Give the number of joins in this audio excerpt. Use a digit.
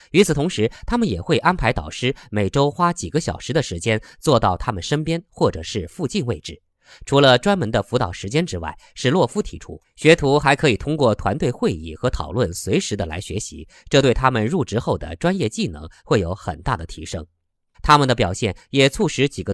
1